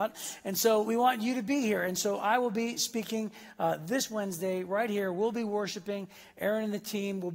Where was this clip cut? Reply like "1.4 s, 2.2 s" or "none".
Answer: none